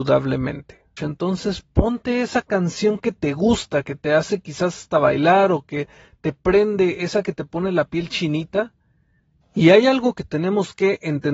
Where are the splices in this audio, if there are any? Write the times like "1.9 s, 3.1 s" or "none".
1.0 s, 9.4 s